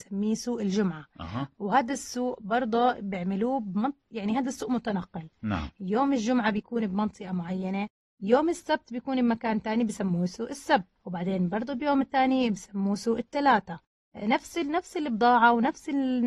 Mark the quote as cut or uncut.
uncut